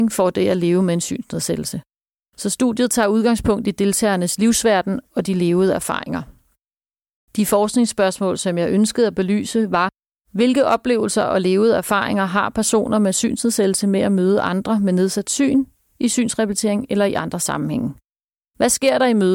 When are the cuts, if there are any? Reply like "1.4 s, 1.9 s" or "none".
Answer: none